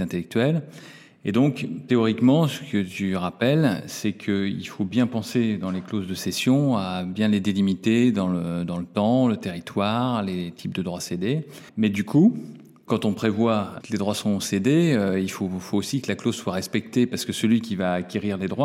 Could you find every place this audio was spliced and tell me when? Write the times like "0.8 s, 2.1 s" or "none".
11.7 s